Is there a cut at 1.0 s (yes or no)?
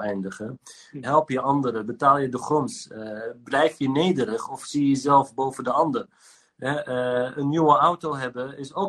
yes